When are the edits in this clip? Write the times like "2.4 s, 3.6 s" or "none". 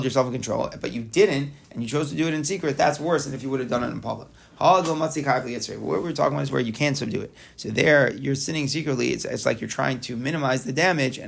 none